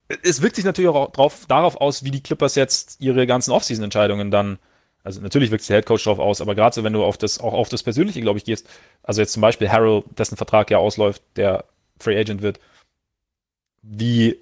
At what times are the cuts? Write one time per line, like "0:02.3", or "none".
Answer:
none